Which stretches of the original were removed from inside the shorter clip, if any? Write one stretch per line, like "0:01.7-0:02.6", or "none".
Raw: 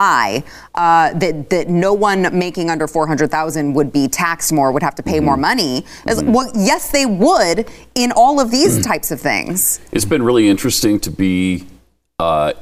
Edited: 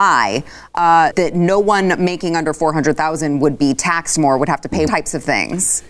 0:01.1-0:01.5
0:05.2-0:08.8